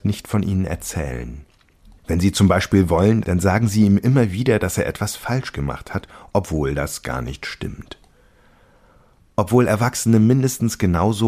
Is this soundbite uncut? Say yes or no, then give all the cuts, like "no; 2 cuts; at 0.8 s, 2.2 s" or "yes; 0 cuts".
no; 2 cuts; at 2.0 s, 3.2 s